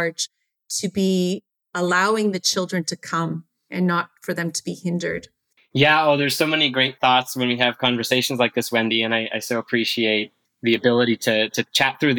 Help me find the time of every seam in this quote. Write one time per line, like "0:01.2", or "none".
0:05.6